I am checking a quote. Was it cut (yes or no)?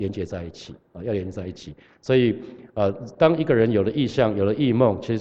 no